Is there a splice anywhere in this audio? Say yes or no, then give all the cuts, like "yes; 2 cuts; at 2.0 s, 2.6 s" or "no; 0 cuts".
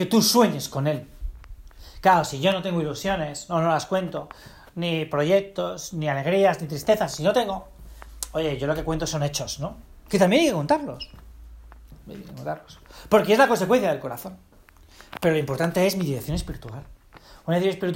no; 0 cuts